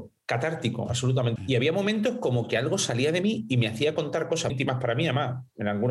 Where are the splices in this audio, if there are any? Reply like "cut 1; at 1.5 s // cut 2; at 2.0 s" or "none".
cut 1; at 1.4 s // cut 2; at 4.5 s